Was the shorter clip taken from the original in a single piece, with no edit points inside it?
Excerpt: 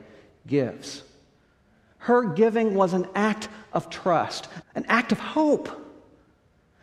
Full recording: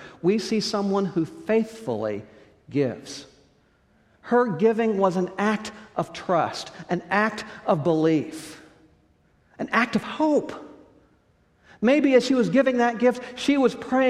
no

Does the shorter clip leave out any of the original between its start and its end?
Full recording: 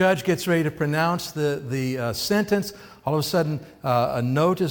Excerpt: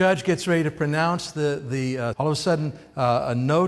yes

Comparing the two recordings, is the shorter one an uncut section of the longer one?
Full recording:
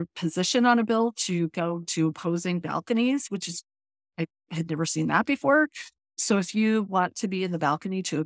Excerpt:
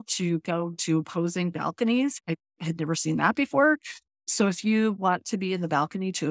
no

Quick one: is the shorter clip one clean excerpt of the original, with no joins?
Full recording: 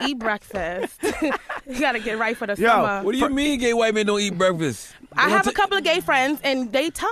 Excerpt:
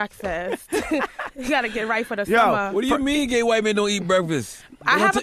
yes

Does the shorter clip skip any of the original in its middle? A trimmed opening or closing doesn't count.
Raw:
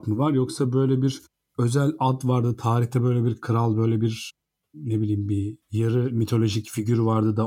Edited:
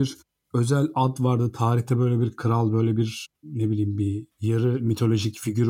yes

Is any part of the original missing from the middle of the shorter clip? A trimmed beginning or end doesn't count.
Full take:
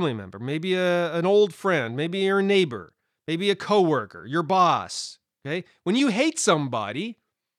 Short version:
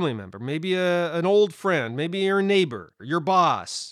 yes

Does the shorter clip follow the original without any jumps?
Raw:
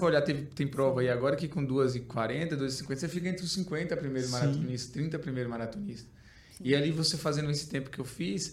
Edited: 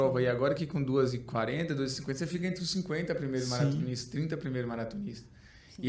yes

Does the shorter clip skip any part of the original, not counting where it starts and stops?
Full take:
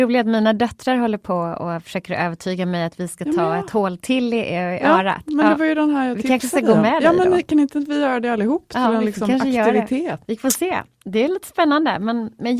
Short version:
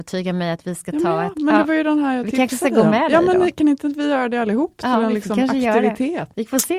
yes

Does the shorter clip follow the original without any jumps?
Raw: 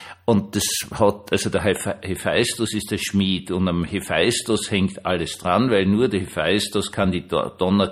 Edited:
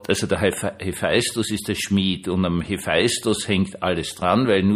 yes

